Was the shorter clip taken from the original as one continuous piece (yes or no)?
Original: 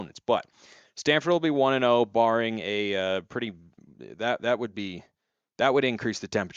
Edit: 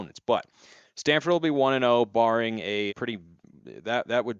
no